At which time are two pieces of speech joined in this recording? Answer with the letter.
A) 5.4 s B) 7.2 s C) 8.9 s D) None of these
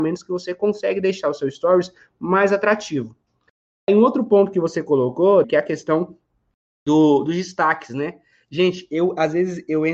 A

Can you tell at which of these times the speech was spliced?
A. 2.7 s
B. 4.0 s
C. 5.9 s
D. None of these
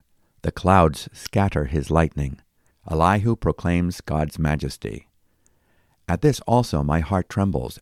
A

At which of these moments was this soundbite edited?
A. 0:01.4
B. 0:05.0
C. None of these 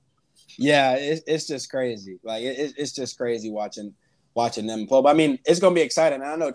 C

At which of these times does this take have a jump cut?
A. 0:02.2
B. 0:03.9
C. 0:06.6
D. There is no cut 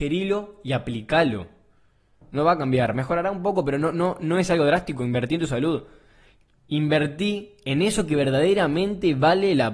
A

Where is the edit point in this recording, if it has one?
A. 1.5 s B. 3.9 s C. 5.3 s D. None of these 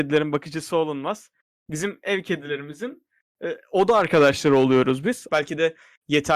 C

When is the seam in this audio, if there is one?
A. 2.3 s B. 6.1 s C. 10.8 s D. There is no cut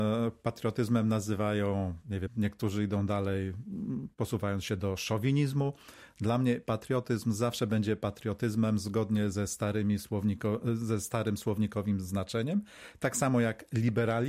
A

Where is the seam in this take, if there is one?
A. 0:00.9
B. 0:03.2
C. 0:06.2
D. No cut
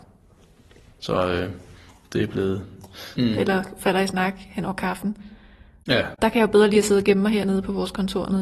B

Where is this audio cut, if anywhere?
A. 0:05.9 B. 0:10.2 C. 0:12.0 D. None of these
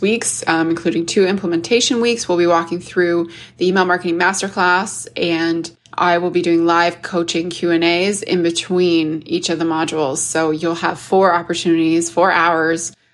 A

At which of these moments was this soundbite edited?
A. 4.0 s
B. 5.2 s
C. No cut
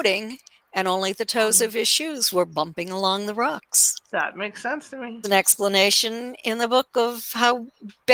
B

